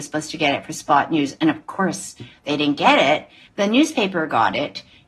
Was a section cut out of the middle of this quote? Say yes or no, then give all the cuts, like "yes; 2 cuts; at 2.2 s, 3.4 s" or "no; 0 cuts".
yes; 1 cut; at 3.5 s